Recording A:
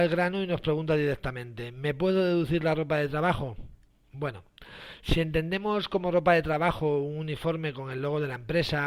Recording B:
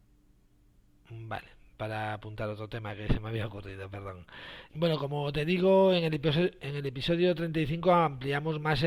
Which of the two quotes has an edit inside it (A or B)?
B